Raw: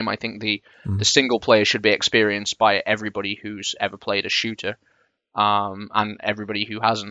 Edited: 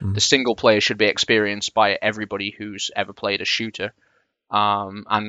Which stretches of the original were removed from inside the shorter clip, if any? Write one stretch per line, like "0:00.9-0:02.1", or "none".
none